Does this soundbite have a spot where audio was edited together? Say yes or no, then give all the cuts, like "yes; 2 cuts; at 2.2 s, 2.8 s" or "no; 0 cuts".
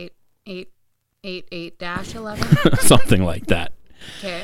no; 0 cuts